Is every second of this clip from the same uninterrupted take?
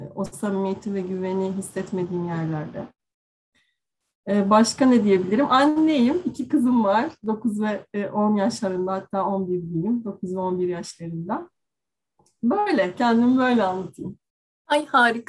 yes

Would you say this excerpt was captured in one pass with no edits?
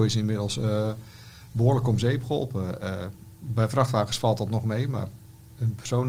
yes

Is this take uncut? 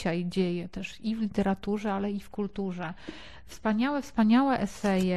yes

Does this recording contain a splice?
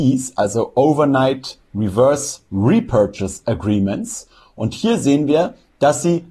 no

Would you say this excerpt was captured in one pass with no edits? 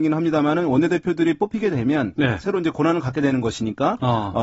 yes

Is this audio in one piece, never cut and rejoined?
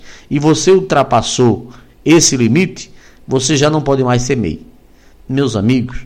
no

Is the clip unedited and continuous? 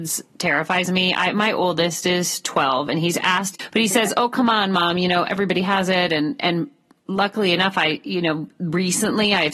no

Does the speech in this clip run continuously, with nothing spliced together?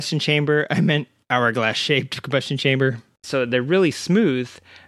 no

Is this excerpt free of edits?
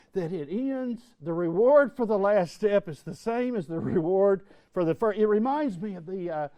yes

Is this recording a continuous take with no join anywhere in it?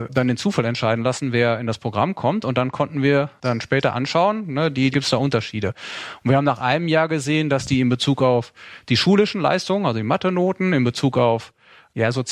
no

